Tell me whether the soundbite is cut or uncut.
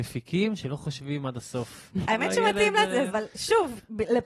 cut